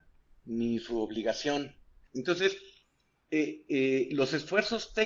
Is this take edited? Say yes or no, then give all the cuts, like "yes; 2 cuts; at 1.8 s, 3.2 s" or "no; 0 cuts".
yes; 1 cut; at 2.1 s